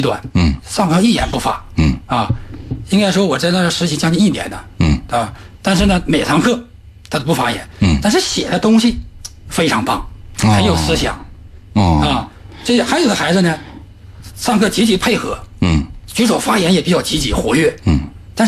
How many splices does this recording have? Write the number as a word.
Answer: zero